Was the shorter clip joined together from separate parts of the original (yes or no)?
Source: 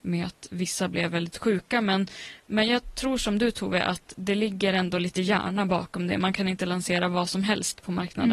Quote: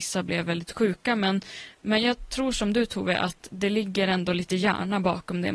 no